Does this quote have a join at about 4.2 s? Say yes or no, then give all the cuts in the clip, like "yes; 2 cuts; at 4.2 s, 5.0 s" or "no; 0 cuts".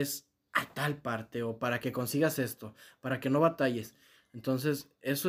yes; 1 cut; at 4.2 s